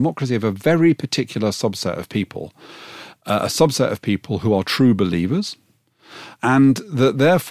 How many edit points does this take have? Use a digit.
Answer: 0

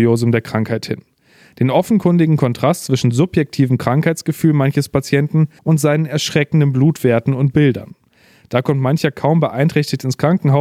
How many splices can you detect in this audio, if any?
1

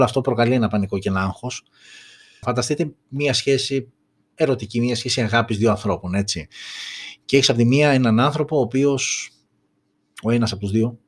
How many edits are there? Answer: 1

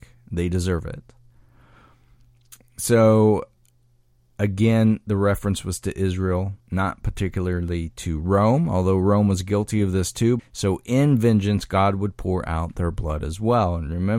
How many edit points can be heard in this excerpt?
2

